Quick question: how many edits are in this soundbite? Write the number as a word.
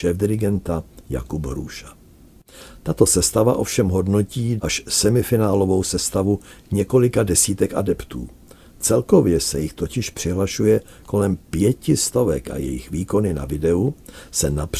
one